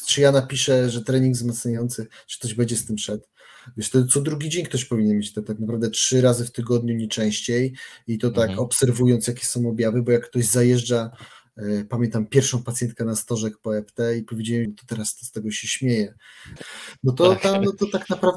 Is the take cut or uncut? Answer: cut